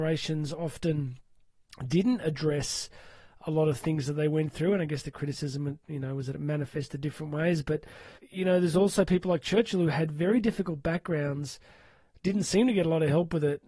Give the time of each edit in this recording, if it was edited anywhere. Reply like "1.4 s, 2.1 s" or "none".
8.2 s